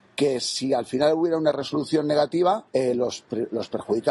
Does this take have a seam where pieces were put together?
yes; 1 cut; at 2.7 s

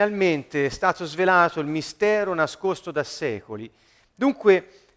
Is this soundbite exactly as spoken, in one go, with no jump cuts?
no; 1 cut; at 4.0 s

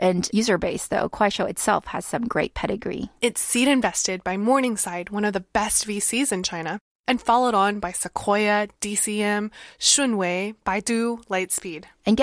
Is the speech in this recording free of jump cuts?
yes; 0 cuts

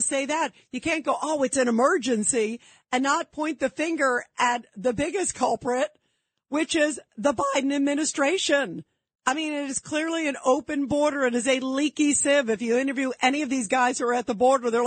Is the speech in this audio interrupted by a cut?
no; 0 cuts

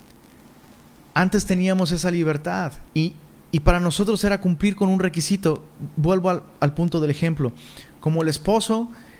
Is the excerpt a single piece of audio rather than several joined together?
no; 1 cut; at 2.9 s

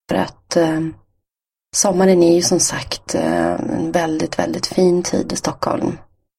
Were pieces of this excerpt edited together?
no; 0 cuts

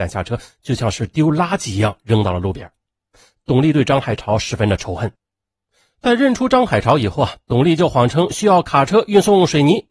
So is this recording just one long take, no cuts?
yes; 0 cuts

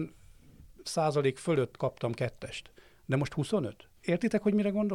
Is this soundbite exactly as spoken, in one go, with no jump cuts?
no; 1 cut; at 4.0 s

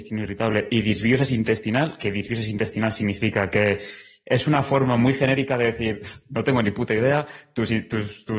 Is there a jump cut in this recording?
no; 0 cuts

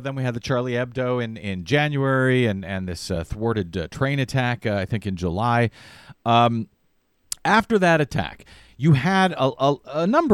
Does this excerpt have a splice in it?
no; 0 cuts

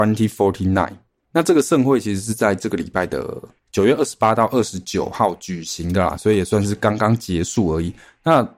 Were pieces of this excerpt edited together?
no; 0 cuts

